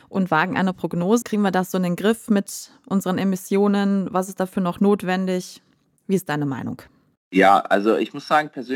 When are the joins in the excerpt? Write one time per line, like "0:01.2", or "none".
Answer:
0:01.2